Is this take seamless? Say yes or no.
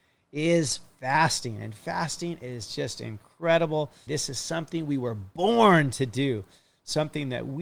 no